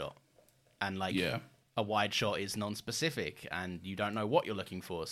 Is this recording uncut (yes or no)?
yes